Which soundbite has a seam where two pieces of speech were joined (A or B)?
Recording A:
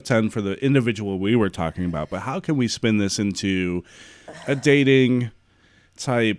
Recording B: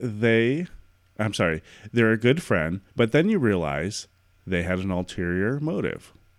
B